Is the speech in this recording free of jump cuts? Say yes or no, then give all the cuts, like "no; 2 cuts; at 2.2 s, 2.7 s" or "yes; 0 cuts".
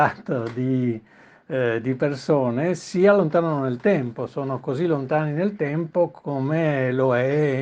yes; 0 cuts